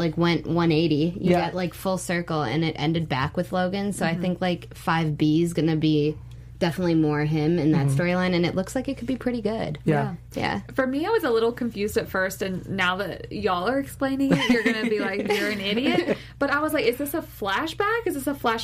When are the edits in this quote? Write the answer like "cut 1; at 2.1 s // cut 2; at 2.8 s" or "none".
none